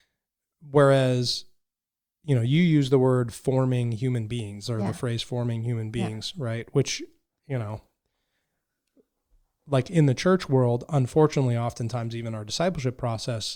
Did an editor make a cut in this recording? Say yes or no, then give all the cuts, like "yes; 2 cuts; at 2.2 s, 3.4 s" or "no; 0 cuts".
no; 0 cuts